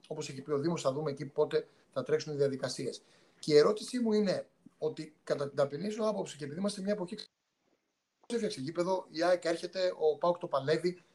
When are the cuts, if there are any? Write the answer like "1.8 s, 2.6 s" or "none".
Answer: none

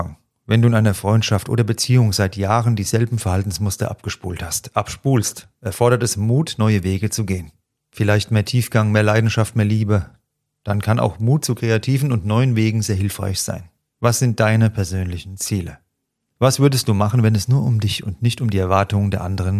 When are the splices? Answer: 7.8 s, 13.9 s

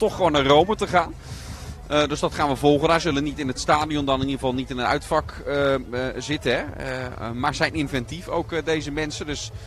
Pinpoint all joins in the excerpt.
none

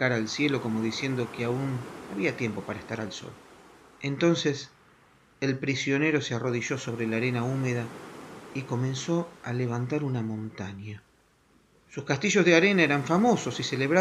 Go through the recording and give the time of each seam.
none

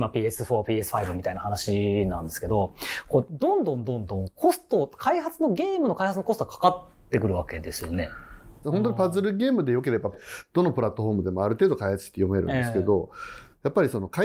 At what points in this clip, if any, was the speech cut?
8.6 s, 10.1 s

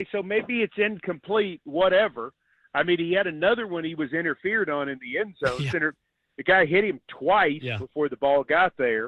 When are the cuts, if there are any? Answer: 5.7 s

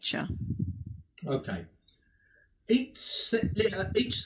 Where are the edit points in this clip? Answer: none

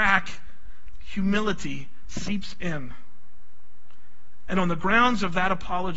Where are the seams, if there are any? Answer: 4.5 s

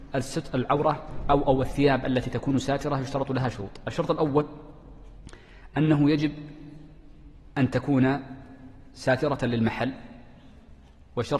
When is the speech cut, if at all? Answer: 7.5 s

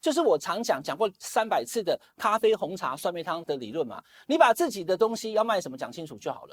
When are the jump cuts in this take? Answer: 3.4 s

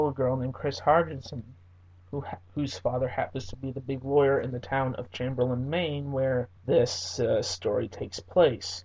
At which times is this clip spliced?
6.6 s

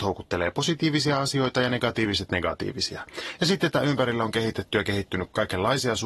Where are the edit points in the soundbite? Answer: none

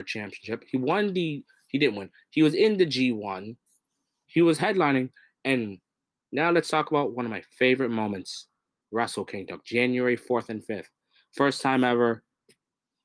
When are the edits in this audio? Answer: 8.8 s

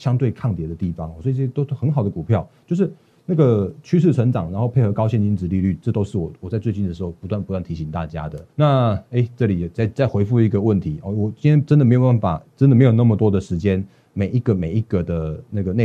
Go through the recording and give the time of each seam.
8.5 s

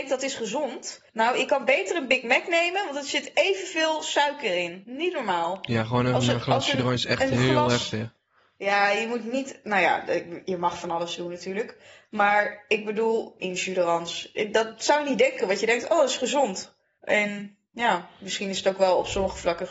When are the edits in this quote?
1.1 s, 13.4 s

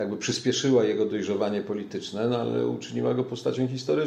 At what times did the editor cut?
none

